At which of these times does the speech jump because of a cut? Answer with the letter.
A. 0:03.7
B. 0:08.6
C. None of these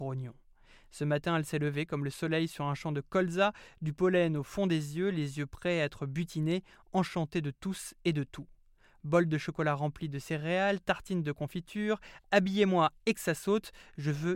C